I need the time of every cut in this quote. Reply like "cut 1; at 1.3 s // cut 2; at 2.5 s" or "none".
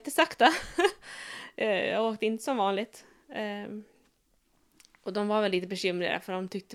none